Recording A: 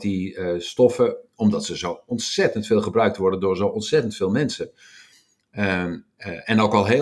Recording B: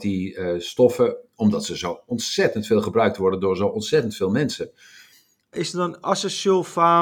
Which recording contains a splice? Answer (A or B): B